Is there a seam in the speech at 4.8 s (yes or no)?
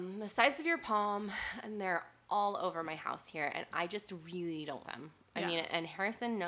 yes